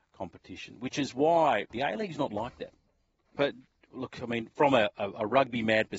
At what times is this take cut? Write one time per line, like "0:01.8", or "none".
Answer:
0:01.7
0:03.4